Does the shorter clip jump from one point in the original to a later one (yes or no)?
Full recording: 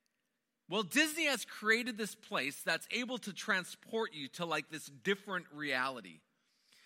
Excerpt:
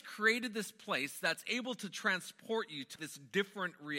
yes